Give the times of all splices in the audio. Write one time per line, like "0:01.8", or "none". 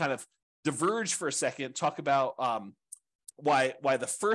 0:03.2